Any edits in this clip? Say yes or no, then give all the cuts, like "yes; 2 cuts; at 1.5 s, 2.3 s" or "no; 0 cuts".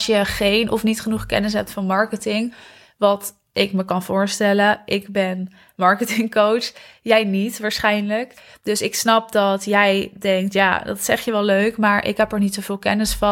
no; 0 cuts